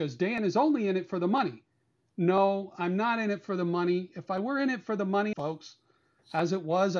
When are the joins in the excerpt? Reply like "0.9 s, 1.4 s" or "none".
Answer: 5.3 s